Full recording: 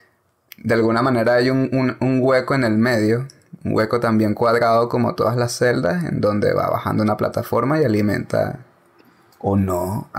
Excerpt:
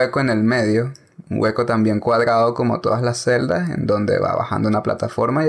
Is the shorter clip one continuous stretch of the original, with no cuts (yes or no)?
yes